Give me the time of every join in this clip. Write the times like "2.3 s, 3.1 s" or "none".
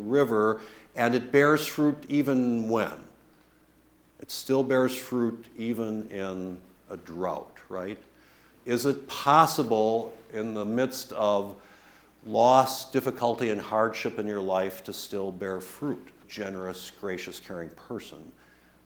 16.2 s